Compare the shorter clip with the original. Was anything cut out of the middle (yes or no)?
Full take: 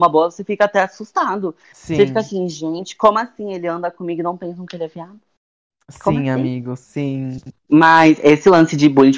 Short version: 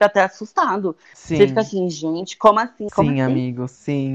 yes